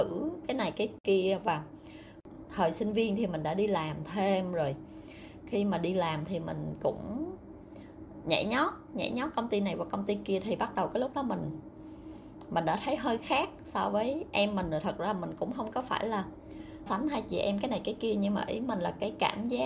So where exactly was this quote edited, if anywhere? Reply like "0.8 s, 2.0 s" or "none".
13.2 s, 16.9 s